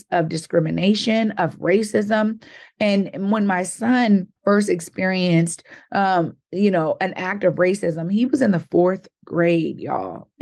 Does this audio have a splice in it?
yes; 1 cut; at 4.4 s

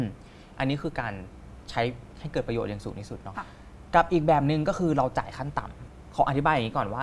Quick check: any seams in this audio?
yes; 1 cut; at 3.3 s

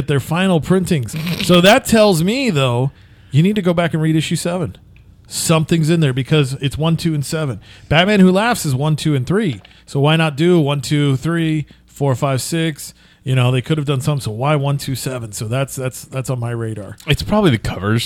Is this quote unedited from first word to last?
yes; 0 cuts

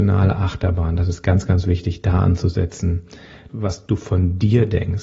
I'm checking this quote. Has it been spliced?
yes; 1 cut; at 3.5 s

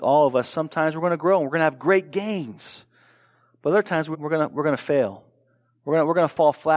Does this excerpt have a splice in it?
yes; 1 cut; at 4.1 s

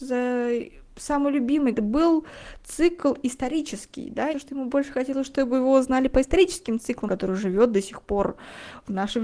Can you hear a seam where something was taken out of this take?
yes; 3 cuts; at 1.7 s, 4.3 s, 7.1 s

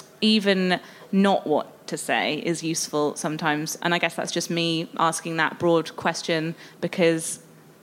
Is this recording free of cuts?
no; 1 cut; at 3.8 s

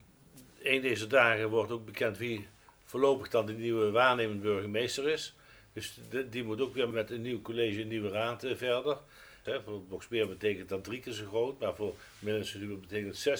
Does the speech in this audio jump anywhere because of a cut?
yes; 2 cuts; at 6.9 s, 9.5 s

